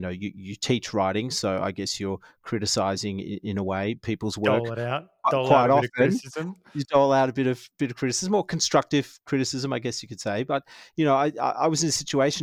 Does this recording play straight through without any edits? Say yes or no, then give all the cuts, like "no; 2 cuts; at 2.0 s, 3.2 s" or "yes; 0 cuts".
yes; 0 cuts